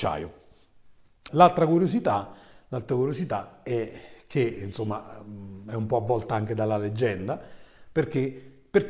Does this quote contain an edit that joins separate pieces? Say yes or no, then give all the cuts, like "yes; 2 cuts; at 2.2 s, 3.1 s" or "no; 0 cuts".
yes; 1 cut; at 1.3 s